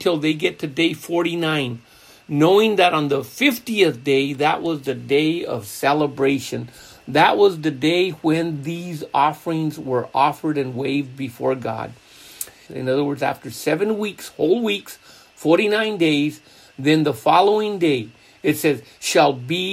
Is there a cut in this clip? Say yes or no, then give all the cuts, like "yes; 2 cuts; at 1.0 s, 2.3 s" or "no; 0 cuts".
yes; 1 cut; at 12.7 s